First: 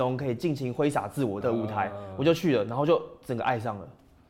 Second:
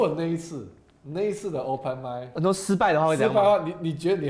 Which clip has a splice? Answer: first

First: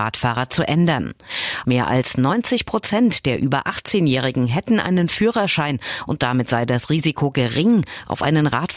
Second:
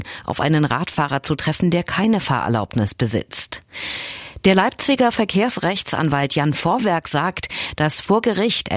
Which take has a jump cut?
first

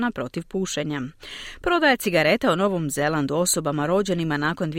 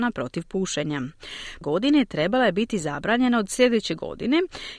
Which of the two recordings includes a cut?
second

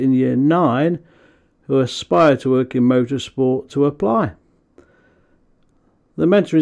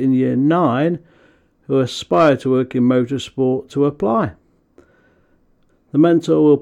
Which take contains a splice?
second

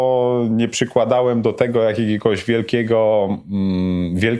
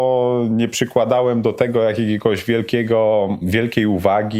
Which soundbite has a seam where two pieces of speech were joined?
second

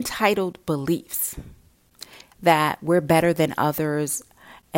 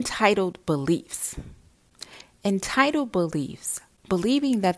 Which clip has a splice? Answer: first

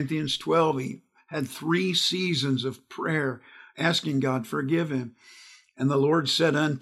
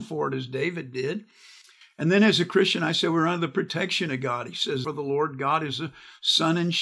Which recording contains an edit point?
second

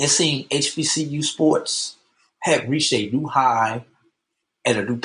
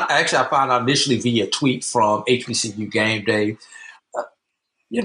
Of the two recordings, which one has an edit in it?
second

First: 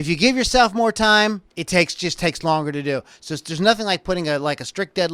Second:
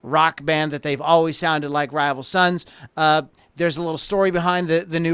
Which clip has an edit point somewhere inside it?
first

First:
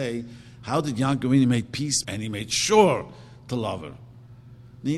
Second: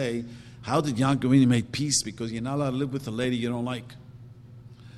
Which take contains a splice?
first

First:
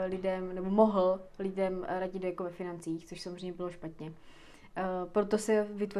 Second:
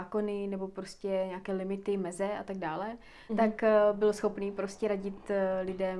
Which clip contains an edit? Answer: second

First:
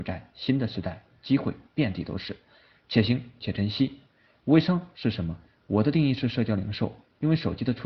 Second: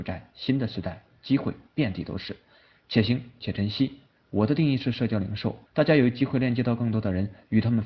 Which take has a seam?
second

